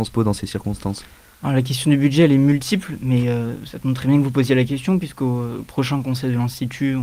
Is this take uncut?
yes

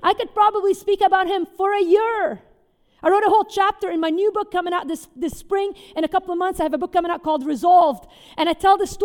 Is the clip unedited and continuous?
yes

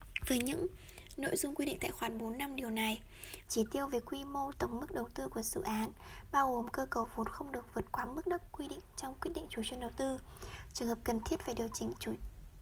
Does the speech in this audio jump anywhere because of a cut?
yes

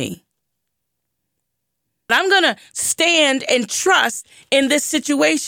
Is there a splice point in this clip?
yes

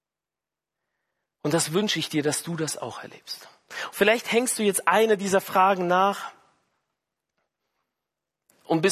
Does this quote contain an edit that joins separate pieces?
no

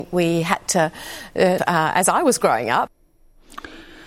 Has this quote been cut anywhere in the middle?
yes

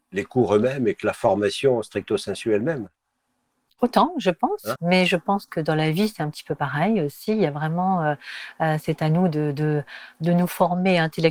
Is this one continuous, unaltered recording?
no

